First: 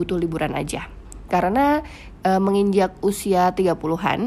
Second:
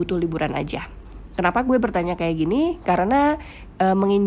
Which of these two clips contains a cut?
first; 1 cut; at 1.3 s

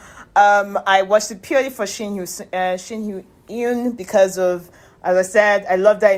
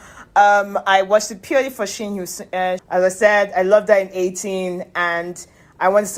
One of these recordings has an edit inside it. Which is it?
second; 1 cut; at 2.8 s

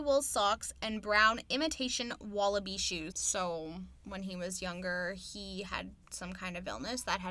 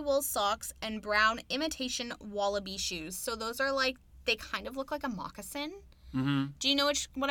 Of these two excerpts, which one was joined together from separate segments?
first; 1 cut; at 3.1 s

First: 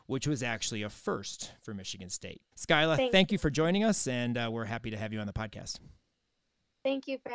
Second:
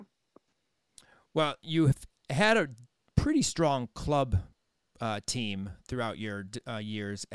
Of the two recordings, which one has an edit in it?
first; 1 cut; at 2.5 s

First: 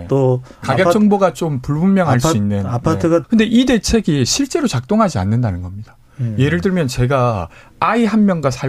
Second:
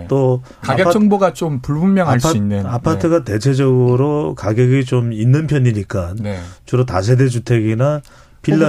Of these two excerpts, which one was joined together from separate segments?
first; 1 cut; at 3.2 s

